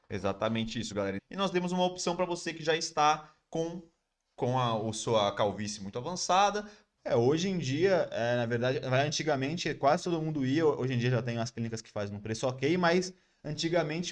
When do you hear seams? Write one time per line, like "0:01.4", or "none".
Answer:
0:01.2
0:07.0